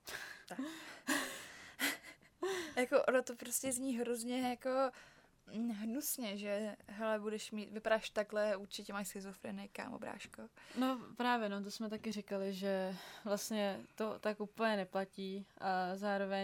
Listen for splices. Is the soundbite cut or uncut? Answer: uncut